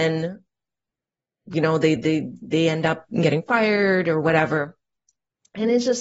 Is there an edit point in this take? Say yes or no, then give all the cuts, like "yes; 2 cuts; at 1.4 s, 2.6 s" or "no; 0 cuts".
no; 0 cuts